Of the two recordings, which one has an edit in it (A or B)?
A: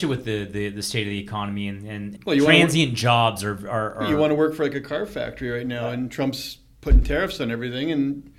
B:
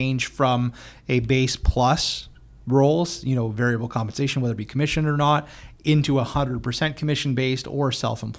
A